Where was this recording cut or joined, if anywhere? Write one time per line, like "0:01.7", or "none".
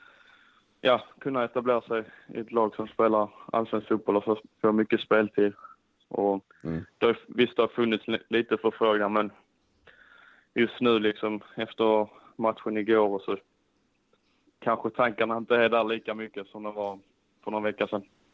0:13.2